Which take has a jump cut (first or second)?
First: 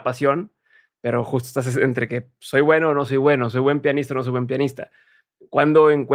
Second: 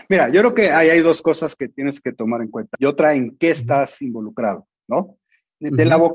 second